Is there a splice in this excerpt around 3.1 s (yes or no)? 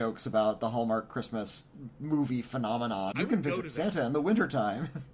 yes